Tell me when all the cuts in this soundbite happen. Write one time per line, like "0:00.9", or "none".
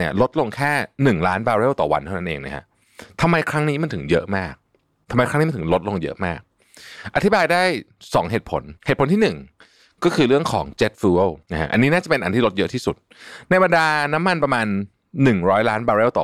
0:08.8
0:11.4